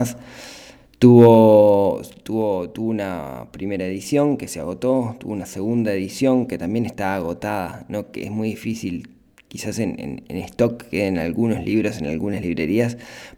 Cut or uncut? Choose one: uncut